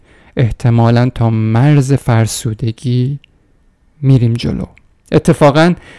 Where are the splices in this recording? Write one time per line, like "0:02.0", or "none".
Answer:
none